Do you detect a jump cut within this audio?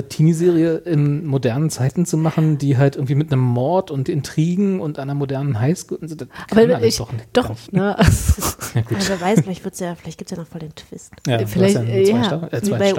yes; 1 cut; at 7.7 s

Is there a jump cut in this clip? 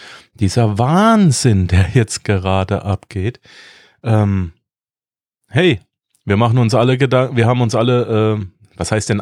no; 0 cuts

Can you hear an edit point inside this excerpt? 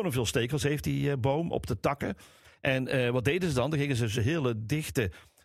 no; 0 cuts

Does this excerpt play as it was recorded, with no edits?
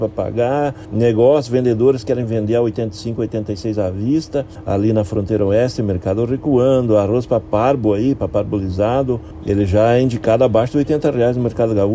yes; 0 cuts

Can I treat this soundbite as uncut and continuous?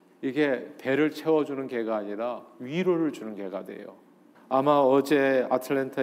no; 1 cut; at 4.3 s

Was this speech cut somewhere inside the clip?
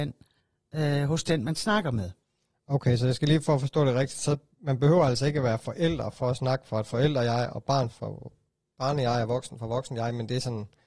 yes; 1 cut; at 7.9 s

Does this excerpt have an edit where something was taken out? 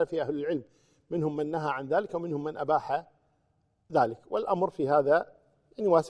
no; 0 cuts

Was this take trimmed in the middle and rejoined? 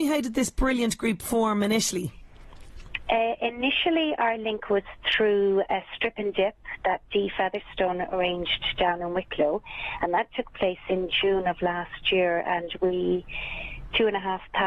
yes; 1 cut; at 5.7 s

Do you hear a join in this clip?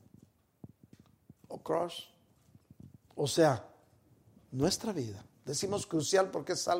no; 0 cuts

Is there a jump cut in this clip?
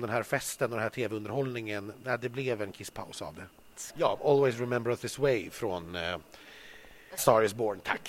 yes; 2 cuts; at 3.9 s, 7.2 s

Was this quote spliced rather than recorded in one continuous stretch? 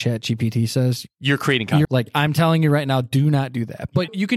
yes; 1 cut; at 1.8 s

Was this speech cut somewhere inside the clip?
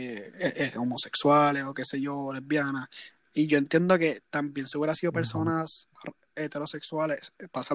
no; 0 cuts

